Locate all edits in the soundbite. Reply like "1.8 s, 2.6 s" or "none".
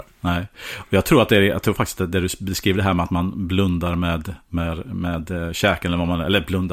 none